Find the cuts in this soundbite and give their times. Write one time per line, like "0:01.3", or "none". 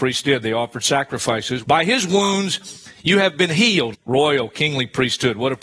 0:01.6
0:03.9